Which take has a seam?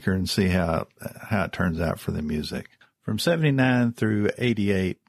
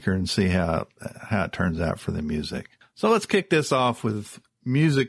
first; 1 cut; at 2.8 s

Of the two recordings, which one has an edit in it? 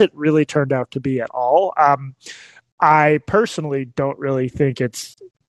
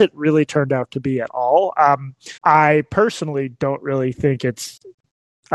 second; 1 cut; at 2.4 s

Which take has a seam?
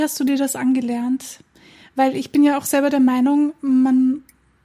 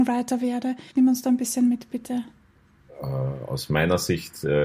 second; 1 cut; at 0.9 s

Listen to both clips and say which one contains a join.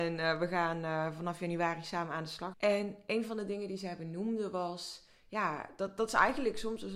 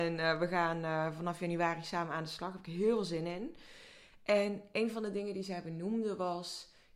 first; 1 cut; at 2.5 s

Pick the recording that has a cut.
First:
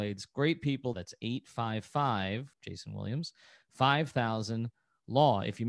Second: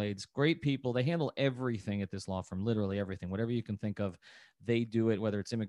first; 2 cuts; at 0.9 s, 2.5 s

